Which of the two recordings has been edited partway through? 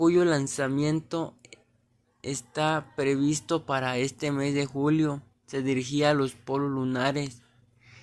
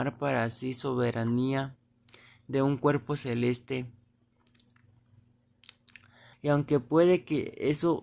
second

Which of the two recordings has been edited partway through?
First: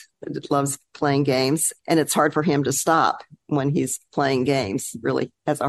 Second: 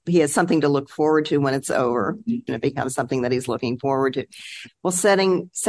second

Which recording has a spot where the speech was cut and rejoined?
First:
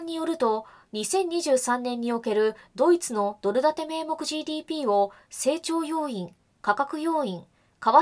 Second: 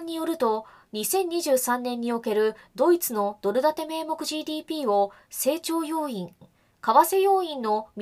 second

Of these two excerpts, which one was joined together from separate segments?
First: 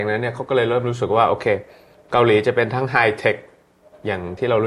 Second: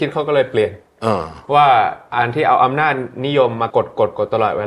second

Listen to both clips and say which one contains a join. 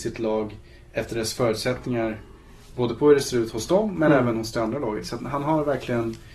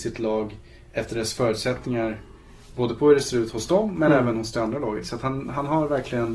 first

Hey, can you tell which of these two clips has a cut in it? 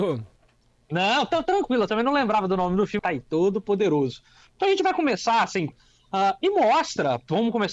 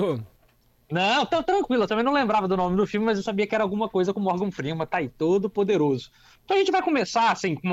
first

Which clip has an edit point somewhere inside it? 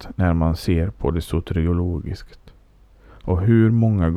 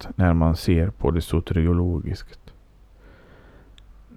first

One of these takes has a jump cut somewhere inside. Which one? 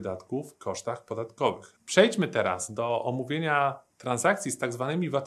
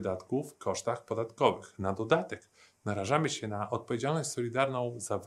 first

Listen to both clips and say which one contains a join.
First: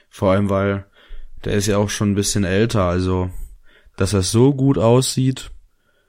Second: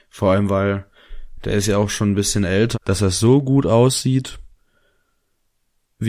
second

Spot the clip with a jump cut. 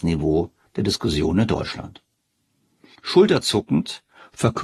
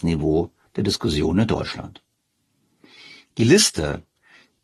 first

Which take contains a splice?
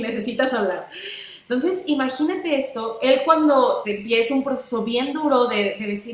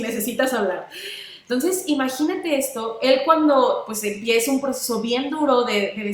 first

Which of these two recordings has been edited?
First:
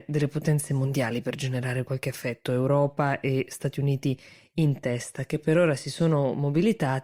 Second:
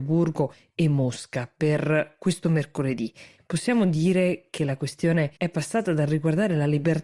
second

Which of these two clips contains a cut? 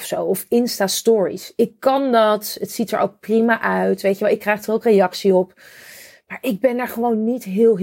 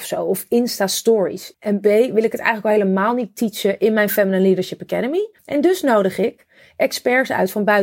second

